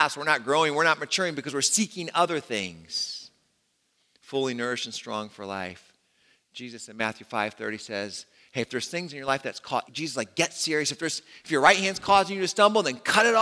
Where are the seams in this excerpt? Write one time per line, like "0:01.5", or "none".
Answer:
0:09.9